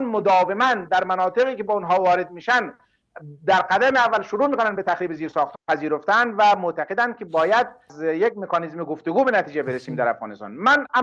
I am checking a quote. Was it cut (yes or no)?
yes